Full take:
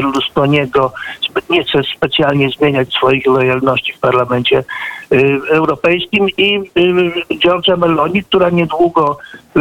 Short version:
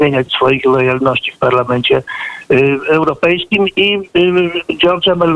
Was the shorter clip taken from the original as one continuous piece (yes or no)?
yes